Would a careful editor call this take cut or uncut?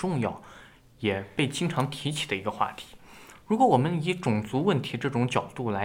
uncut